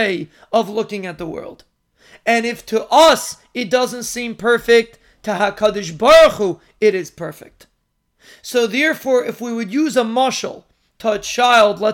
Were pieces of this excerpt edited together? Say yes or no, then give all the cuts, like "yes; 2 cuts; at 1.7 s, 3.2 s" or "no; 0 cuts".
no; 0 cuts